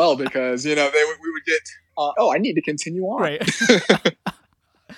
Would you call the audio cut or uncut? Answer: cut